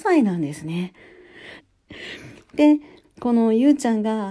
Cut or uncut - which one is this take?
cut